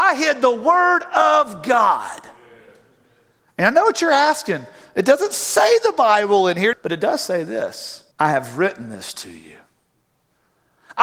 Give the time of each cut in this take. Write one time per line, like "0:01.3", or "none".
0:06.7
0:08.1